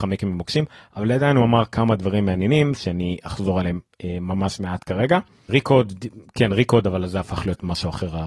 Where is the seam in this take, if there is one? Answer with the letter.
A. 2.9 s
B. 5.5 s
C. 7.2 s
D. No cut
B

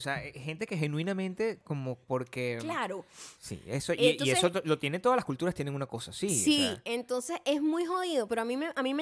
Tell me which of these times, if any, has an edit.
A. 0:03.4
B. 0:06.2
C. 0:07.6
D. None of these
A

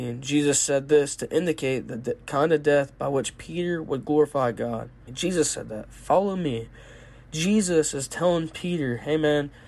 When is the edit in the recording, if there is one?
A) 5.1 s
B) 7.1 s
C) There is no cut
A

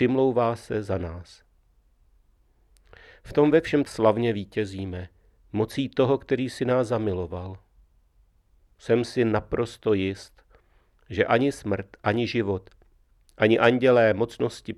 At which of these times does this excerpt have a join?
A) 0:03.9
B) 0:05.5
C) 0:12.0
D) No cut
A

